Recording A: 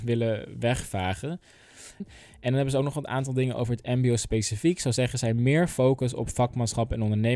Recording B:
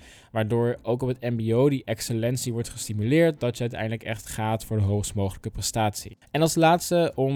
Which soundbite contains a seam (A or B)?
A